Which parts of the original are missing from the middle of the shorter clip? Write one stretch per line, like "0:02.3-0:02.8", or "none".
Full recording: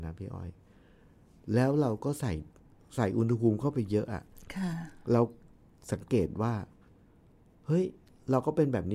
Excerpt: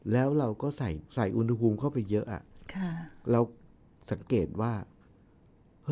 0:02.5-0:02.9